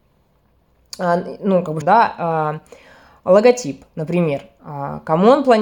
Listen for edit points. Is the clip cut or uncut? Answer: cut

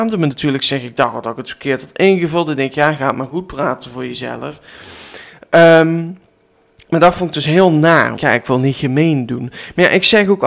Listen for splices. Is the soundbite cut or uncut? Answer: cut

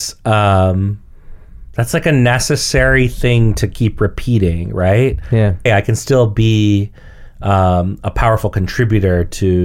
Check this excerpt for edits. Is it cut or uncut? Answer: cut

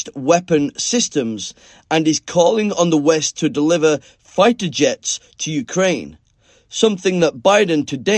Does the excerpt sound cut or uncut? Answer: uncut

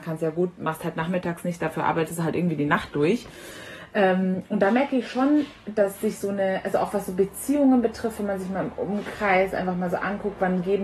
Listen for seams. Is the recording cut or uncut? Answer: uncut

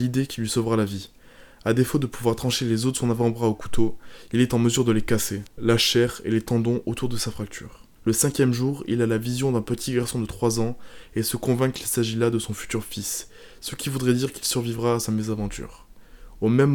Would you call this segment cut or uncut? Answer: cut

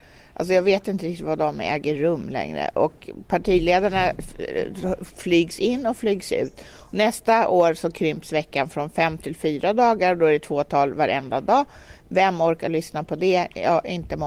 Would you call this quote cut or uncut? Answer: uncut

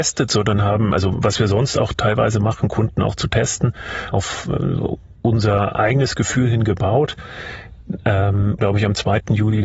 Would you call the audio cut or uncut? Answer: cut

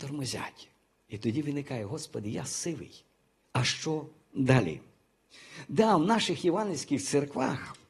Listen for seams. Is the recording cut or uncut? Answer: cut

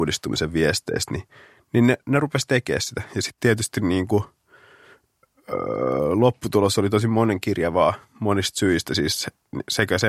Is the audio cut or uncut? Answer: uncut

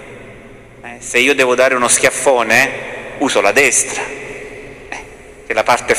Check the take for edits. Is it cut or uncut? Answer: uncut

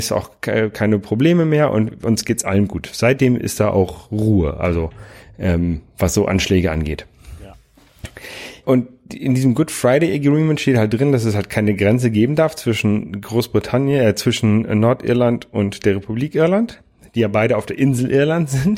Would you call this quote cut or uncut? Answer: cut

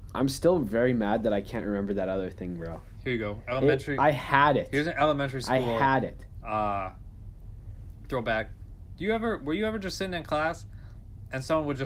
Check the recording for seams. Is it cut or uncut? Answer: uncut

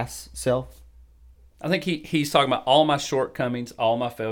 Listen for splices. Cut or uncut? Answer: uncut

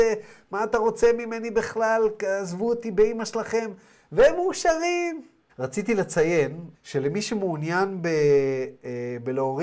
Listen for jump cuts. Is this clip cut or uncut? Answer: cut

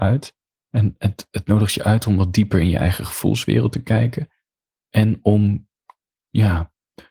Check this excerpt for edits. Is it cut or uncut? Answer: uncut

